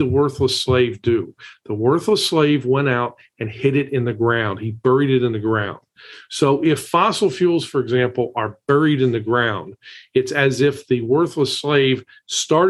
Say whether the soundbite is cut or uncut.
uncut